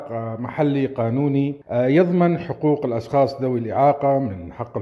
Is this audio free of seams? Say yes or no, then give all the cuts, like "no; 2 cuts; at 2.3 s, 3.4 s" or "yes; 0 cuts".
no; 1 cut; at 1.6 s